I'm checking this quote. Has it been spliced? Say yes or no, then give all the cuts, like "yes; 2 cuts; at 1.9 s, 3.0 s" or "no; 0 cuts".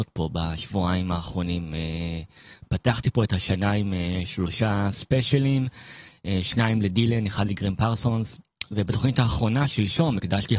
no; 0 cuts